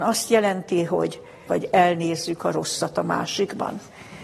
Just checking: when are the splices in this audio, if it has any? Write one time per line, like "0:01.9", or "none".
0:01.5